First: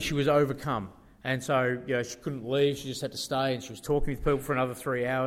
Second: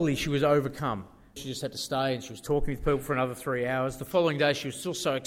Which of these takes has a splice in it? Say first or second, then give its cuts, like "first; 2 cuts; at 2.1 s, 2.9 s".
second; 1 cut; at 1.4 s